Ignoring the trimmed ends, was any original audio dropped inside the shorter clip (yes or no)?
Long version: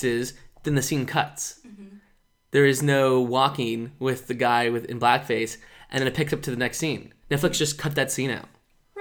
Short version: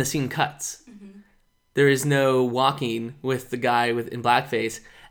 no